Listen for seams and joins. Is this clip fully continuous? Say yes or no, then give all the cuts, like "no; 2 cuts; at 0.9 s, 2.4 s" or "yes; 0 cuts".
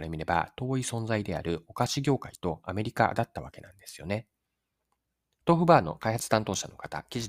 no; 1 cut; at 5.4 s